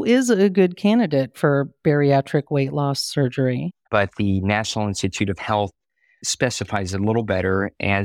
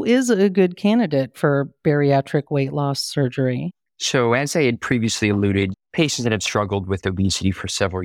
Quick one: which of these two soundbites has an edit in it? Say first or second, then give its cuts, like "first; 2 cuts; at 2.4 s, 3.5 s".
first; 1 cut; at 3.9 s